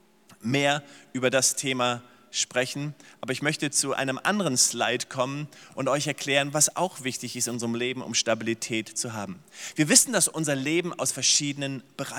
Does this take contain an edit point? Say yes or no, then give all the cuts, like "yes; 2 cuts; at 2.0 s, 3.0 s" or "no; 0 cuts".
no; 0 cuts